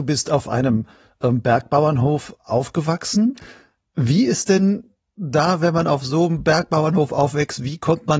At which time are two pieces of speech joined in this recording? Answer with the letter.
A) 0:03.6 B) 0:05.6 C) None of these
C